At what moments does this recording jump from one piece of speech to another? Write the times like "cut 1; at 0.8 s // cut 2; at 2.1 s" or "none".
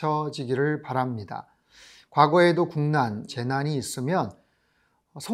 cut 1; at 3.3 s